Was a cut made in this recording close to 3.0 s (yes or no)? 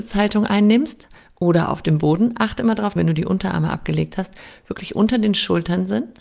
yes